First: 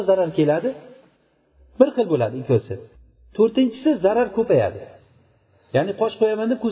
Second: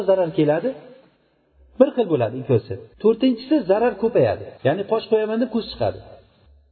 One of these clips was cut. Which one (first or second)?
second